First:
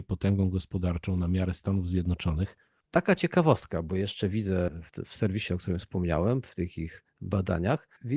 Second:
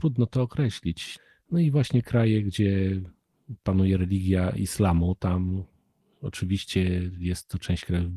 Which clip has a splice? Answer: first; 1 cut; at 2.9 s

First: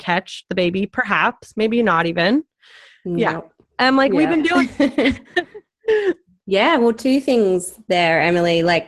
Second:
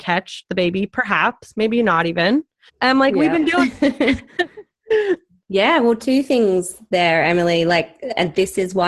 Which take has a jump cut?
second; 1 cut; at 2.7 s

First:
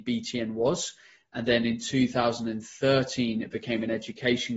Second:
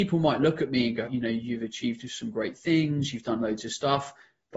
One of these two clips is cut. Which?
second; 1 cut; at 1.1 s

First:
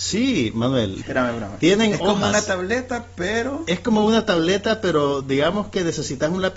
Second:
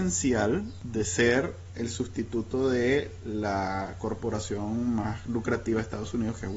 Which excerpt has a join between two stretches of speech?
first; 1 cut; at 1.0 s

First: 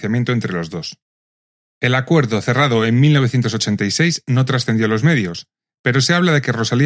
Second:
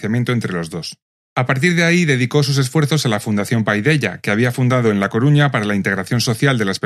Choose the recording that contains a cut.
second; 1 cut; at 1.1 s

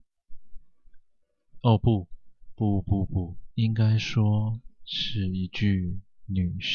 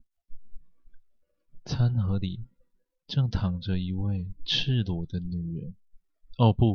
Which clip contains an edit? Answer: first; 2 cuts; at 1.6 s, 3.5 s

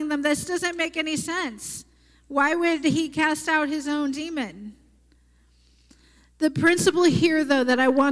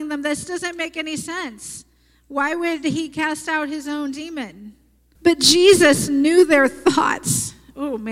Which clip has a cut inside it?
second; 1 cut; at 5.2 s

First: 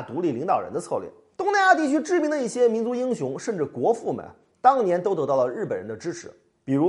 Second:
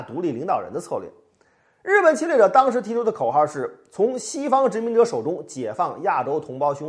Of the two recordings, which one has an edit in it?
first; 1 cut; at 1.4 s

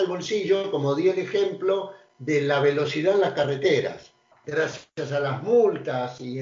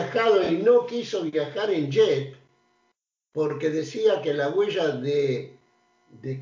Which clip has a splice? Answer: first; 1 cut; at 4.3 s

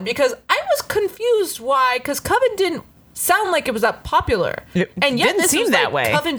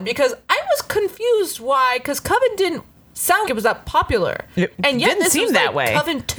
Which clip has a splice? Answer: second; 1 cut; at 3.5 s

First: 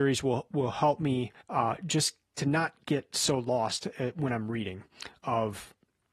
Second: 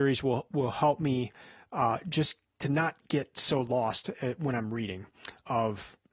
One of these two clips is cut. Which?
first; 1 cut; at 1.4 s

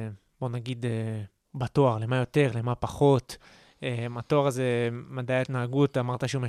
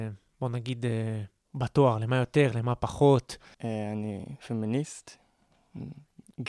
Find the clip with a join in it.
second; 1 cut; at 3.5 s

